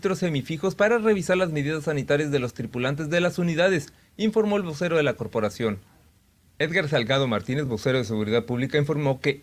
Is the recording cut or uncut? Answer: uncut